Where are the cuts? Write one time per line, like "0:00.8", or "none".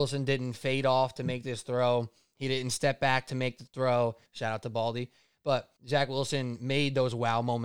0:04.3
0:05.8